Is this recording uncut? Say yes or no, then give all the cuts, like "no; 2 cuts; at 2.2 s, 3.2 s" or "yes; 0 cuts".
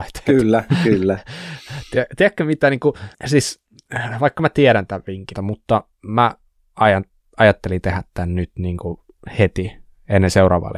no; 2 cuts; at 3.1 s, 5.3 s